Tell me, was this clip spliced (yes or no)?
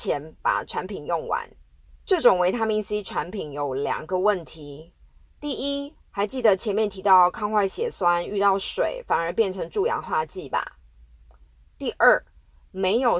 yes